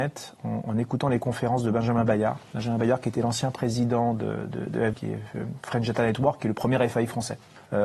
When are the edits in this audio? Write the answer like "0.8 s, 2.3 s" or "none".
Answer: 4.9 s